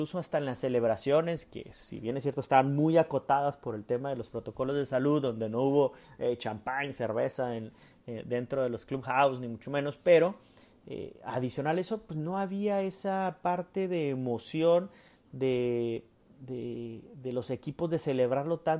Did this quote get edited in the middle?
no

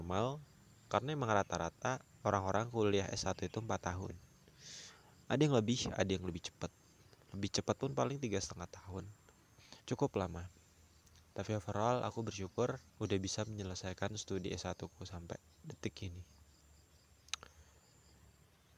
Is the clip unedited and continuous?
no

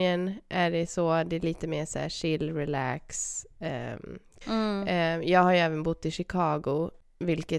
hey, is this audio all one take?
no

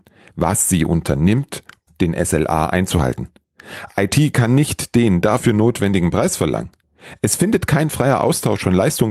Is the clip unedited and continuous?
no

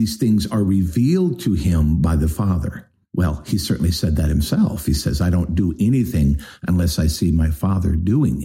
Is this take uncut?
yes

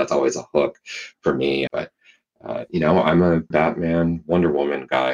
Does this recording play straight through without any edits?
no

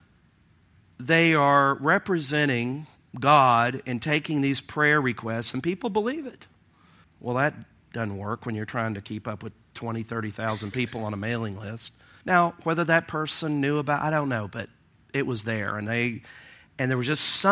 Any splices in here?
yes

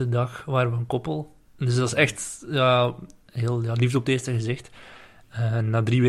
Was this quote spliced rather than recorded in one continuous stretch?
yes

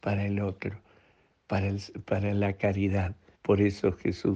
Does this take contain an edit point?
yes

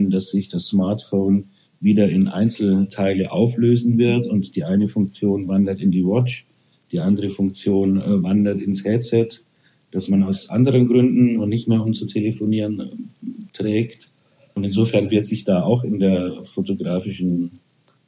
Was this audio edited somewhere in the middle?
no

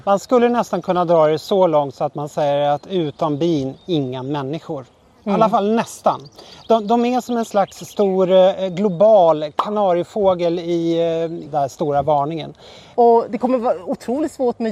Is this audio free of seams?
no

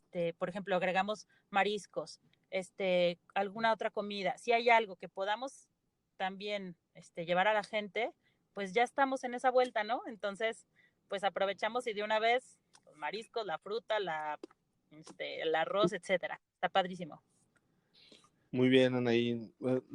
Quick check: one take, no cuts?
yes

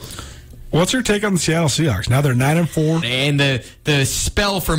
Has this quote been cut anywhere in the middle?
yes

